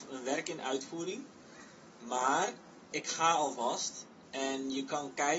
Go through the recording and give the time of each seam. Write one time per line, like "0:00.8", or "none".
0:02.9